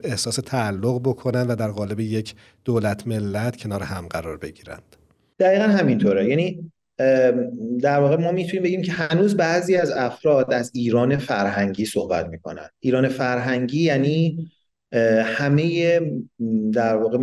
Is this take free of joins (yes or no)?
yes